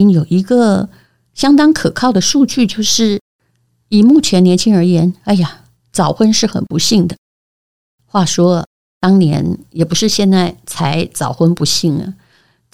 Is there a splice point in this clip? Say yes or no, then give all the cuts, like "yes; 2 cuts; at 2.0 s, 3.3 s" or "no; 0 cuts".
no; 0 cuts